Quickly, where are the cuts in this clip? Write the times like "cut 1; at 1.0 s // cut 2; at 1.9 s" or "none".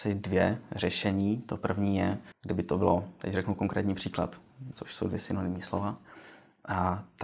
cut 1; at 2.3 s // cut 2; at 4.7 s